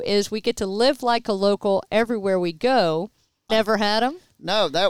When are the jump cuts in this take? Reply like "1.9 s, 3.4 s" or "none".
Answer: 3.5 s

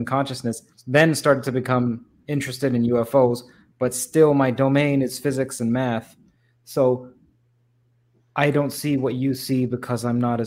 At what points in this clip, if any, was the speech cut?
none

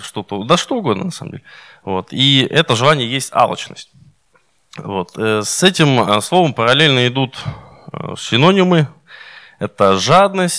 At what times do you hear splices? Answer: none

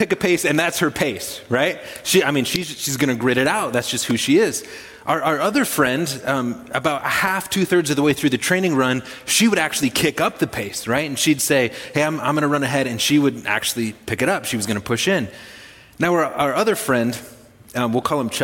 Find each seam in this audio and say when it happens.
none

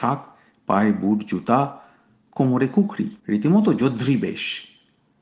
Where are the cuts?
3.2 s

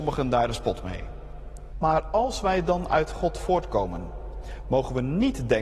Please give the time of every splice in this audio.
1.7 s

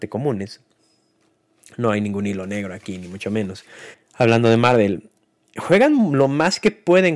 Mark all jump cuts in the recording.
3.9 s

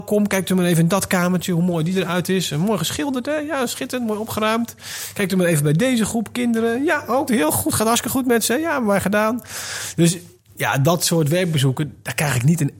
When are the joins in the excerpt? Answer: 7.3 s

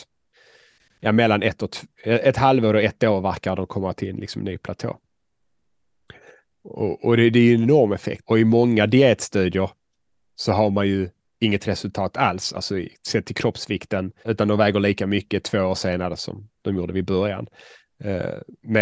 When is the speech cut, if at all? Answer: 8.2 s, 14.2 s

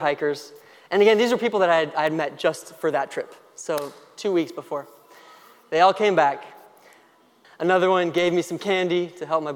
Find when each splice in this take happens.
7.4 s

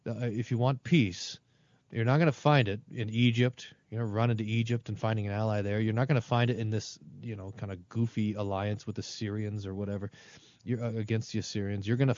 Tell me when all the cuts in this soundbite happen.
none

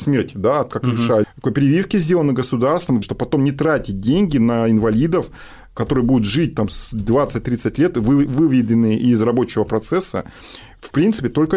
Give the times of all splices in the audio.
1.2 s, 3.0 s

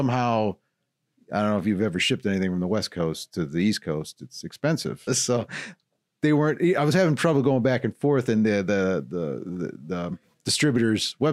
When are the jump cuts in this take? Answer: 5.1 s

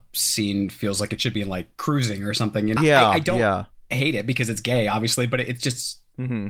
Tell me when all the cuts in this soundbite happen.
2.8 s

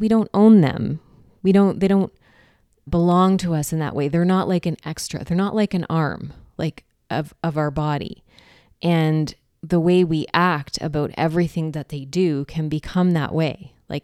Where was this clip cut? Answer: 2.9 s, 9.5 s

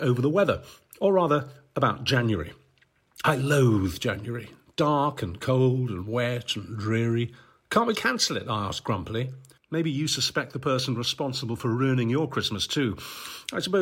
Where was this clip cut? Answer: 7.9 s, 9.6 s

